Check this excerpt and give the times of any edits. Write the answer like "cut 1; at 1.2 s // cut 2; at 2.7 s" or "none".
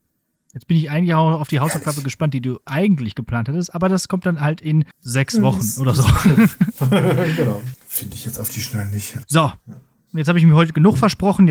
cut 1; at 4.9 s // cut 2; at 7.7 s // cut 3; at 9.2 s

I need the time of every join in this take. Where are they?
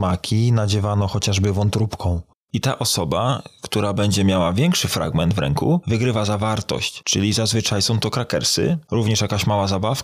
cut 1; at 2.5 s

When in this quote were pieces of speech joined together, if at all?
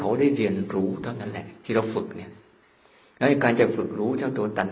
none

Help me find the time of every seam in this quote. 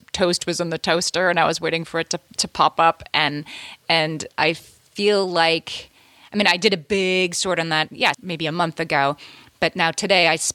cut 1; at 8.1 s

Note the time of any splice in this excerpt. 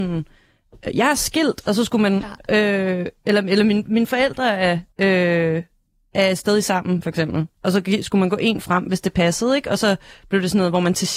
cut 1; at 4.9 s

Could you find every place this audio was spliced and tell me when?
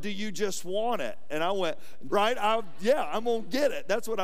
cut 1; at 2.1 s

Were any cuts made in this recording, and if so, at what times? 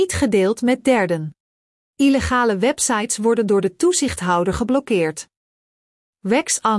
cut 1; at 1.9 s

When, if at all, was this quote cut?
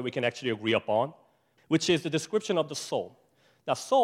cut 1; at 1.6 s

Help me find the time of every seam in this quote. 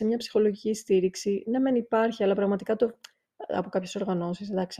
none

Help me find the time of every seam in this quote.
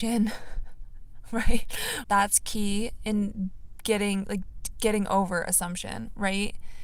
cut 1; at 2.0 s

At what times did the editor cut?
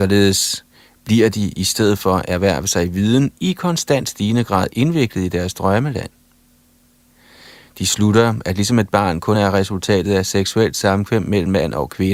none

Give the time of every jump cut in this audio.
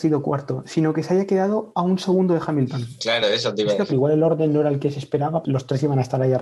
cut 1; at 3.9 s // cut 2; at 5.4 s

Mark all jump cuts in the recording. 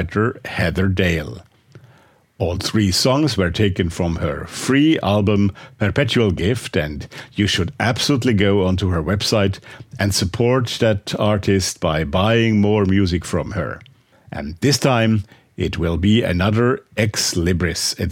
cut 1; at 14.1 s

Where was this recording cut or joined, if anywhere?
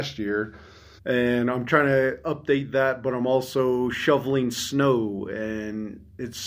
cut 1; at 1.0 s

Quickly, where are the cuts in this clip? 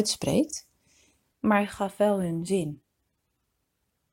cut 1; at 1.3 s

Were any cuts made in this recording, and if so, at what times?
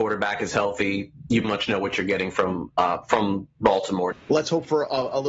cut 1; at 1.4 s // cut 2; at 4.1 s

